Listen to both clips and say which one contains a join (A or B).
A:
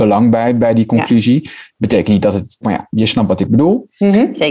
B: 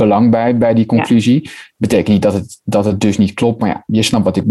A